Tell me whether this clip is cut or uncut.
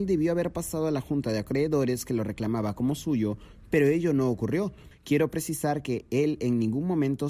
cut